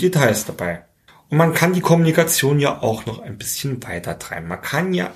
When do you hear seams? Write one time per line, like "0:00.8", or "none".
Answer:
0:01.1